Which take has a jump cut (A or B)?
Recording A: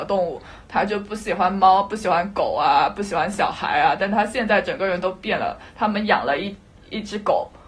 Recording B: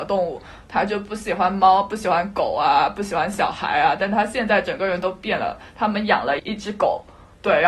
B